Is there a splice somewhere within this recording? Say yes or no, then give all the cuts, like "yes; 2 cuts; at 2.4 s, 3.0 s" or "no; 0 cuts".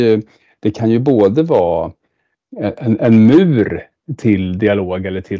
no; 0 cuts